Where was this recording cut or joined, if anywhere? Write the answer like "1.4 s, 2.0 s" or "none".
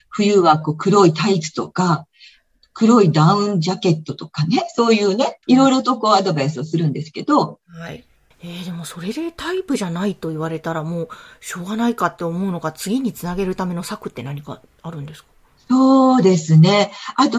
5.4 s

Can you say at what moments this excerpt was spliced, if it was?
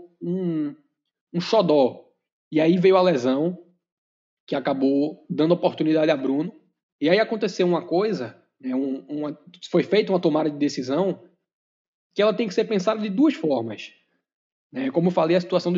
6.8 s

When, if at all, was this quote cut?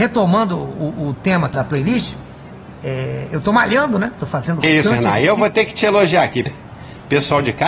1.5 s, 4.6 s, 6.5 s

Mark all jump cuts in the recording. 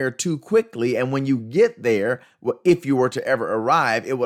none

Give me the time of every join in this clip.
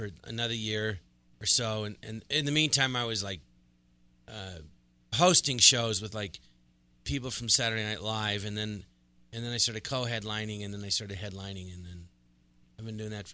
5.1 s

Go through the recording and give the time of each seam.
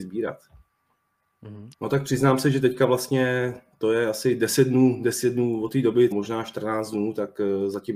1.7 s, 6.1 s

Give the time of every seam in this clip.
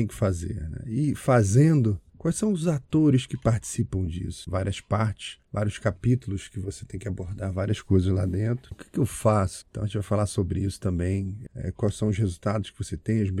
4.5 s, 8.7 s, 11.5 s

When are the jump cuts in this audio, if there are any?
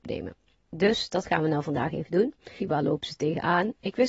2.6 s

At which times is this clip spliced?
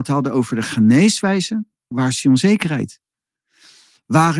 1.9 s

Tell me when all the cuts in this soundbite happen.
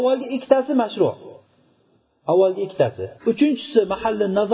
3.2 s

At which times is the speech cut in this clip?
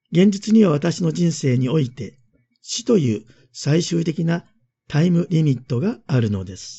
none

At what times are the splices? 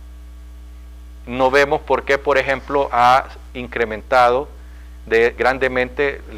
5.4 s

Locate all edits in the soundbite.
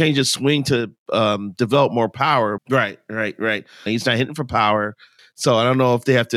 2.6 s, 3.9 s, 5.2 s

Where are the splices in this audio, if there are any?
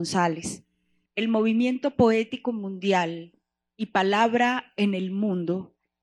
1.1 s

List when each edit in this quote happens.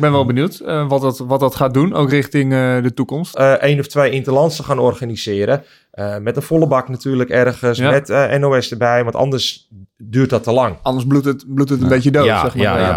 3.3 s

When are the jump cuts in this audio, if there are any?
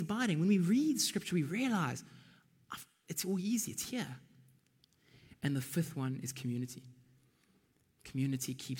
none

